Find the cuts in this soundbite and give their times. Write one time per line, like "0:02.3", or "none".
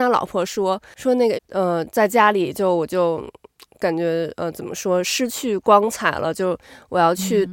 0:01.3